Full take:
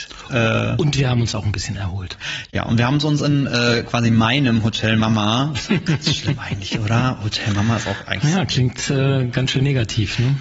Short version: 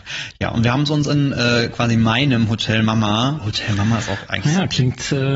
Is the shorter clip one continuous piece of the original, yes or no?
no